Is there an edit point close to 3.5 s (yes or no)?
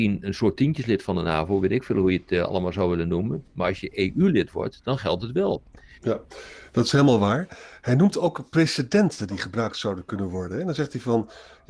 no